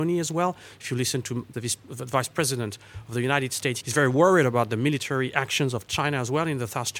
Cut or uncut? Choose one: cut